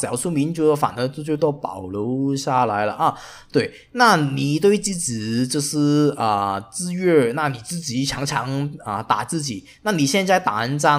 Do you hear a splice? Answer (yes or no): no